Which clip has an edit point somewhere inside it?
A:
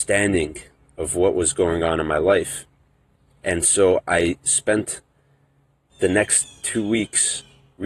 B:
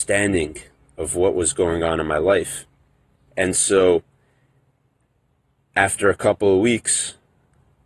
B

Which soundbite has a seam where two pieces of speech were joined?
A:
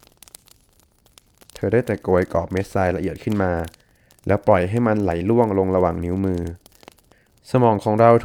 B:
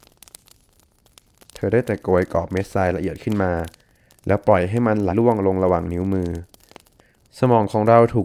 B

